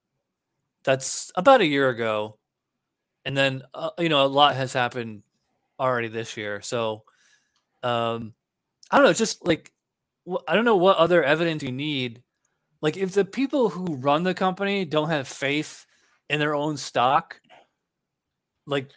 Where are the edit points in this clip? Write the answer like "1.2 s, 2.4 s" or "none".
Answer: none